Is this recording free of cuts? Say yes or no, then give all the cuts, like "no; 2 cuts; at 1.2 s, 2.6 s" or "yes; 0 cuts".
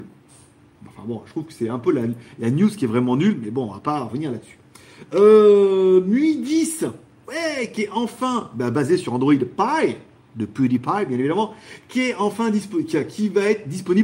yes; 0 cuts